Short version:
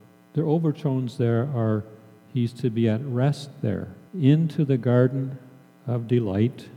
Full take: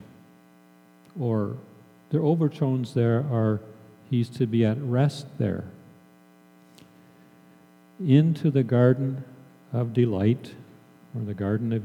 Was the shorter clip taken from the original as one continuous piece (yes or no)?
no